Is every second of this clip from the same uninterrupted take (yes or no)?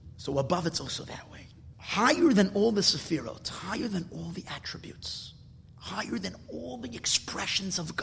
no